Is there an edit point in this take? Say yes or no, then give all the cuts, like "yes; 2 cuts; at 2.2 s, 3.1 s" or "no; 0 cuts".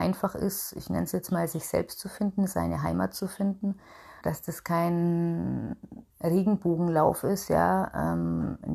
yes; 2 cuts; at 4.2 s, 6.1 s